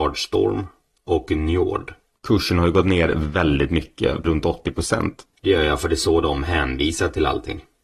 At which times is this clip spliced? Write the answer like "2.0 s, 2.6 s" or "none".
2.2 s, 5.3 s